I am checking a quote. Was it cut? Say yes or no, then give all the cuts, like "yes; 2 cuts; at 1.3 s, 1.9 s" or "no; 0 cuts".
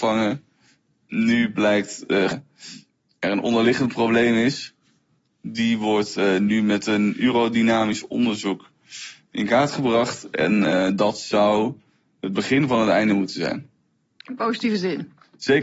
yes; 1 cut; at 2.3 s